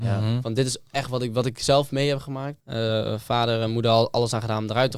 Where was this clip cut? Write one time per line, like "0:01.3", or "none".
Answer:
0:02.6